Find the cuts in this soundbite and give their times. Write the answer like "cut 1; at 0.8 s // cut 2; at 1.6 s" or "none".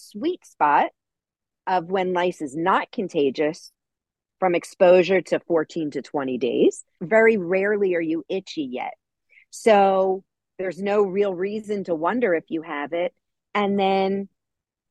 cut 1; at 7.0 s

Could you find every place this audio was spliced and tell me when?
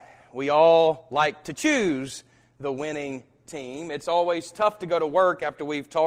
none

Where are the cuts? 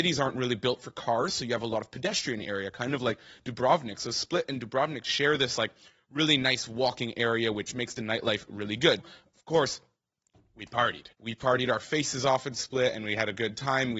cut 1; at 9.0 s // cut 2; at 11.1 s

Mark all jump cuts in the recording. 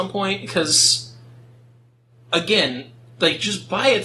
none

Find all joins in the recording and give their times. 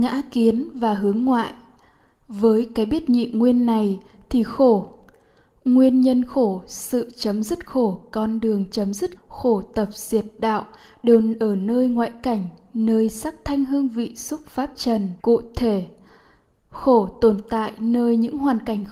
cut 1; at 9.2 s // cut 2; at 15.2 s

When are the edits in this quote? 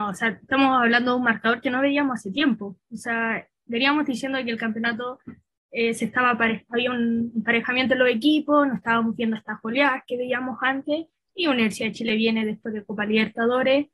cut 1; at 6.7 s

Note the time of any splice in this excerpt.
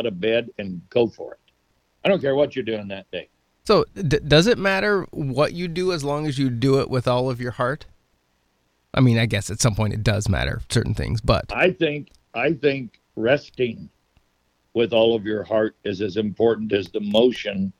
none

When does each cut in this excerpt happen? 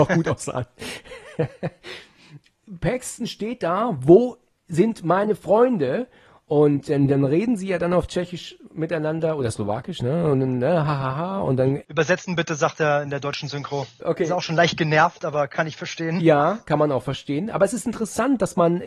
cut 1; at 14.0 s

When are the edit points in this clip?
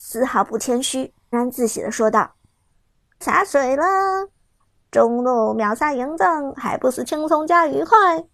cut 1; at 1.3 s // cut 2; at 3.2 s

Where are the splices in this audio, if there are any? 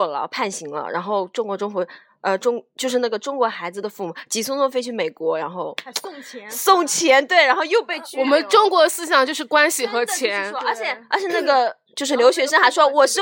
none

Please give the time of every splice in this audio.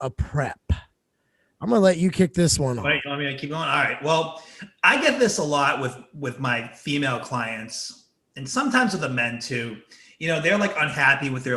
none

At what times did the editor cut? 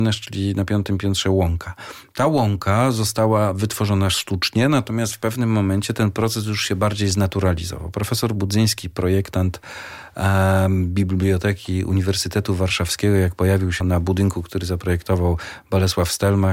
cut 1; at 13.8 s

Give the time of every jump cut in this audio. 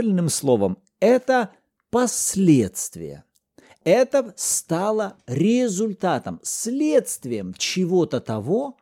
none

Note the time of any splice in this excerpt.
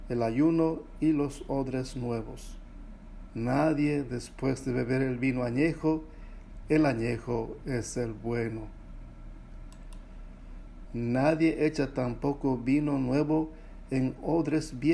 cut 1; at 3.3 s // cut 2; at 6.6 s // cut 3; at 10.8 s

